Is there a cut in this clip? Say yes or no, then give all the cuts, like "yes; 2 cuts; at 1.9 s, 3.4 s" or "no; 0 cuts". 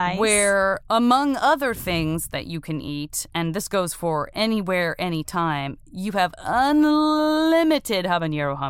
no; 0 cuts